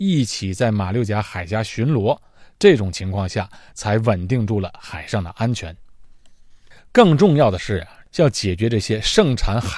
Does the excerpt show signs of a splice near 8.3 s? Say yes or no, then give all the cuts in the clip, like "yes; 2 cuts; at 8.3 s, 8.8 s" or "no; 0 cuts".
no; 1 cut; at 6.8 s